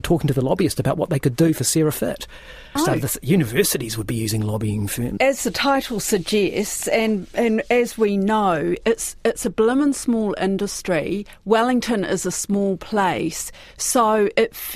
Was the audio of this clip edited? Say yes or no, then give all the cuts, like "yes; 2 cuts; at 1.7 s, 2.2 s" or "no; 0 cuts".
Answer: yes; 2 cuts; at 2.8 s, 5.2 s